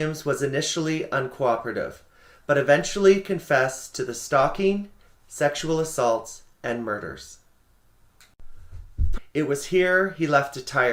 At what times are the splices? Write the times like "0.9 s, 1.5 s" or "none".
5.2 s, 9.2 s